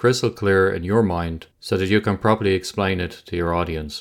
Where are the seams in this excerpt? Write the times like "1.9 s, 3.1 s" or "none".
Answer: 1.5 s